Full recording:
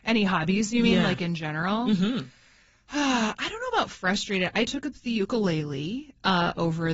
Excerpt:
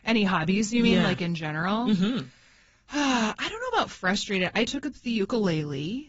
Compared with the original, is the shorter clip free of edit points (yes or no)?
yes